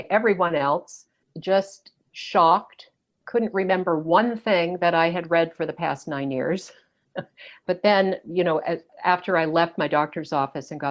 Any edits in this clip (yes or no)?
no